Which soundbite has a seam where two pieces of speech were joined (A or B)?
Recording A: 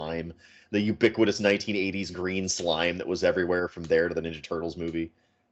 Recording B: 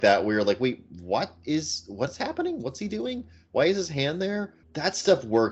B